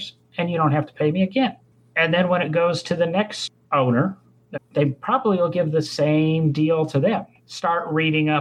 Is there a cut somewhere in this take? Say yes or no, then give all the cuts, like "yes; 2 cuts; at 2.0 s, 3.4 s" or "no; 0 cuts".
yes; 2 cuts; at 4.5 s, 7.4 s